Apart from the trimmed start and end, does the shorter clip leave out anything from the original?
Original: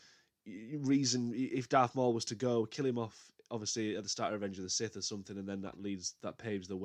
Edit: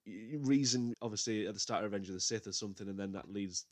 yes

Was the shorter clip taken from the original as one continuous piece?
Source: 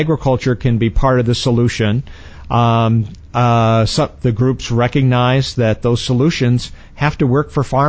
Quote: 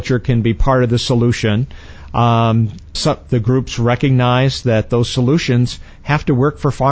no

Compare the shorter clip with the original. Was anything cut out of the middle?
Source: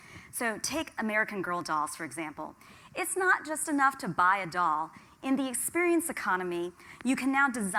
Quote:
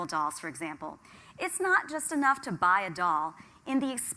no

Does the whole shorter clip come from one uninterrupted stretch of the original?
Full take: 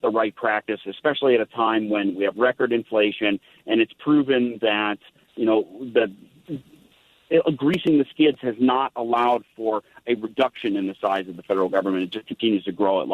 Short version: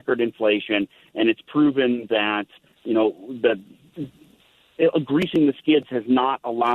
yes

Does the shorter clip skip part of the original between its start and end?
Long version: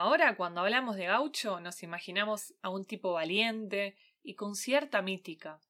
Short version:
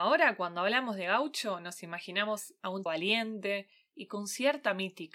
yes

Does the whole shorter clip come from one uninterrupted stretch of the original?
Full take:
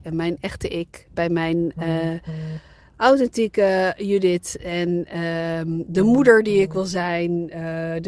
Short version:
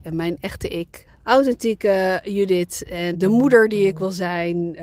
no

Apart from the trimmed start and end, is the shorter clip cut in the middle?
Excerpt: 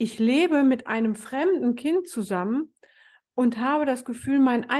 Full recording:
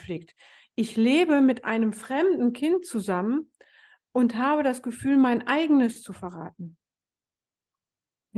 no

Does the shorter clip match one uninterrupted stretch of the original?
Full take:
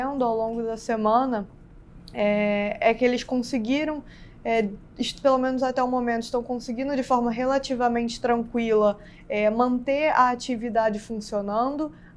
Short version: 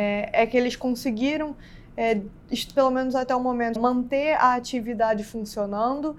no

